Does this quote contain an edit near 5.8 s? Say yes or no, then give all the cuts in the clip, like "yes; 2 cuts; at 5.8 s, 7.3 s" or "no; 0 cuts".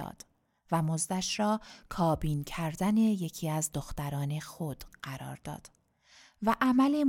no; 0 cuts